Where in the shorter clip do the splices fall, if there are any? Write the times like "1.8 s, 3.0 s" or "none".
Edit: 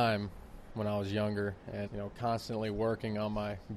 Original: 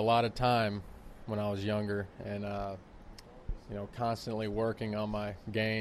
1.9 s